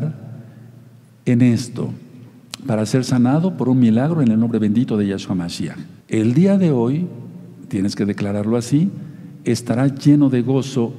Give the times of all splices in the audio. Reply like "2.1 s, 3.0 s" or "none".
6.0 s